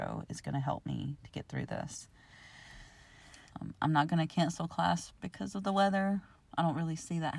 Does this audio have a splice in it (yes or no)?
yes